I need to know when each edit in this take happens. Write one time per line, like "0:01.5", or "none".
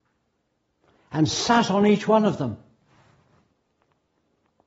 none